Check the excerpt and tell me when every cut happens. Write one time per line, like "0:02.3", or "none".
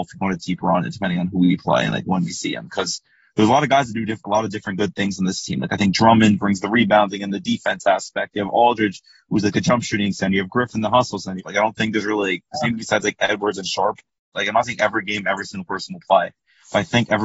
0:11.4
0:14.3